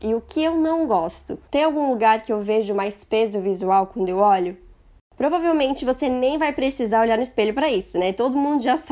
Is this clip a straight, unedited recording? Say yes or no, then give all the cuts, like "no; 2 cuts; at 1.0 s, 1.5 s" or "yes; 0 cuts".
yes; 0 cuts